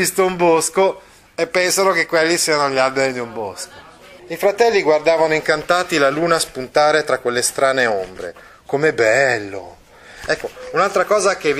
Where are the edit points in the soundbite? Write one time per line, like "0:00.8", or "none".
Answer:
0:04.2